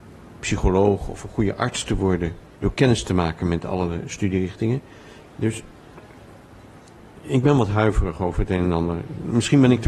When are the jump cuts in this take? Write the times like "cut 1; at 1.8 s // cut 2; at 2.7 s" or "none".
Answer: cut 1; at 2.6 s // cut 2; at 5.2 s